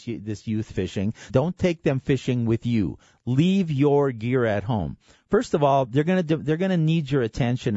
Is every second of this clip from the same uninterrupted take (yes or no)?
no